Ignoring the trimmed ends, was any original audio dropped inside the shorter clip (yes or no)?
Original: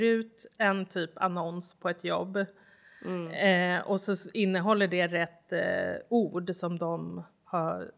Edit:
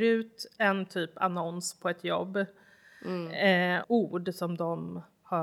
yes